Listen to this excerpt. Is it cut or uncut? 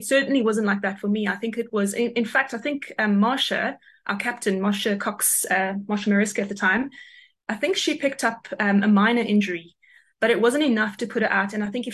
uncut